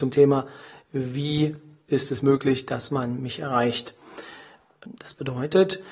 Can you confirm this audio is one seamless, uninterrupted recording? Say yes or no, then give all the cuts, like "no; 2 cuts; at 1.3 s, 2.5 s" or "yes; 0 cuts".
no; 1 cut; at 5.0 s